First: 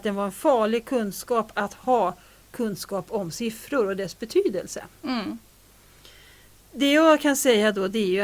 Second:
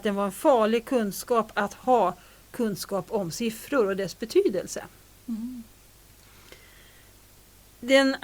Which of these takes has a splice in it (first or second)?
first